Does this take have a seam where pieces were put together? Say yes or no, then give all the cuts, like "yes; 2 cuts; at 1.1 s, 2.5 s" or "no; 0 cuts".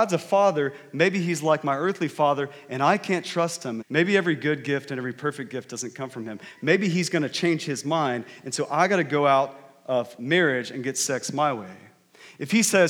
yes; 1 cut; at 3.8 s